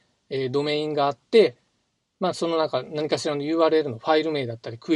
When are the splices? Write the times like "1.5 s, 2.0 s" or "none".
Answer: none